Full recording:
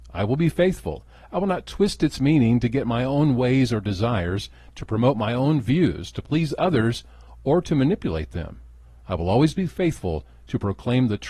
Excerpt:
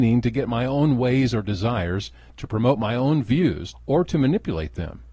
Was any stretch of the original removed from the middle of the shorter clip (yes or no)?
yes